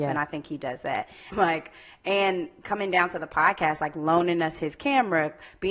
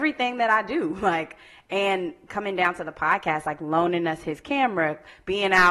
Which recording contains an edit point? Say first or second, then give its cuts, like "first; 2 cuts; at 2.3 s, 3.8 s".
first; 1 cut; at 1.3 s